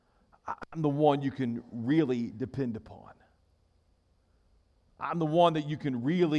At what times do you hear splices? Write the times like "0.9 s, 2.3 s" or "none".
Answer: none